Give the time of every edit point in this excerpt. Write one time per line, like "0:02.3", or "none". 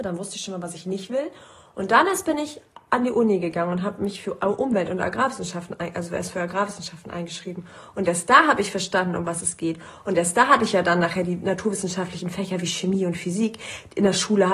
none